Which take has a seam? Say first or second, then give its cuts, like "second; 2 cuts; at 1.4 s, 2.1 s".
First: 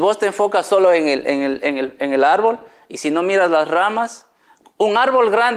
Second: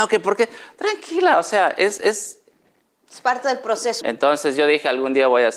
second; 1 cut; at 4.0 s